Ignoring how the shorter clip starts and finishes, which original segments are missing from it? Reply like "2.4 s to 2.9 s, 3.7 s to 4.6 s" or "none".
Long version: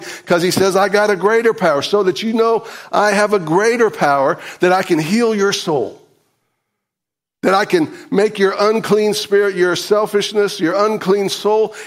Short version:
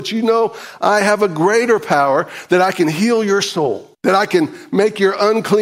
6.0 s to 7.3 s

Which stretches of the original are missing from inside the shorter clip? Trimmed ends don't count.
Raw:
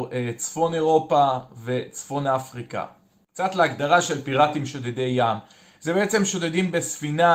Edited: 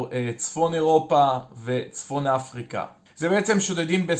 3.1 s to 5.7 s

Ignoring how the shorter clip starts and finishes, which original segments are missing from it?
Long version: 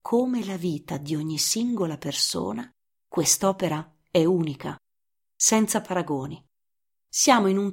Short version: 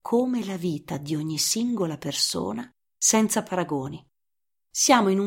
3.0 s to 5.3 s

